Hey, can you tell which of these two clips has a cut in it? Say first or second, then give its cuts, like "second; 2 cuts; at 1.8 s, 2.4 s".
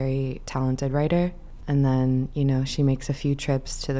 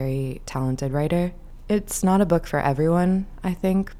first; 1 cut; at 1.6 s